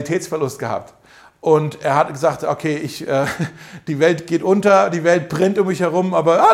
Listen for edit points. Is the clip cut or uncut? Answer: uncut